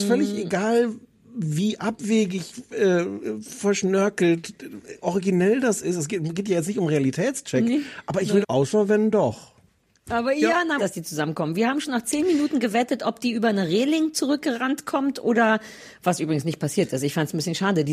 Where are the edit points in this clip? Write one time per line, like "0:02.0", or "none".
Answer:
0:08.4
0:10.8

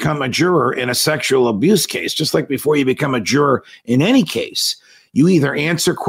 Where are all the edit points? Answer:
none

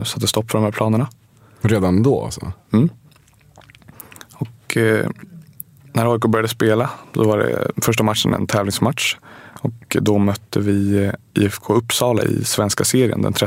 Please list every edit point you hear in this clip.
none

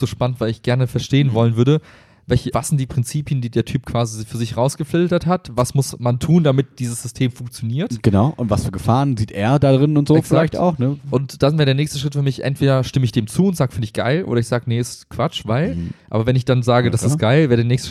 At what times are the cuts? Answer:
0:02.5

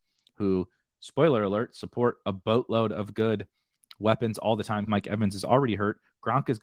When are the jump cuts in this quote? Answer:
0:04.9

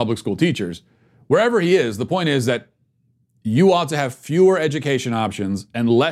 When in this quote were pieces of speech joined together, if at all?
none

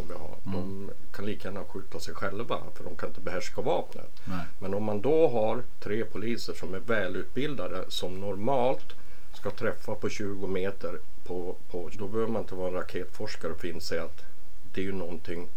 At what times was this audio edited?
0:11.9

